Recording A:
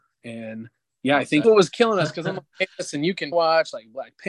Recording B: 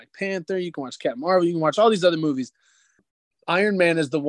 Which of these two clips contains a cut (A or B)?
A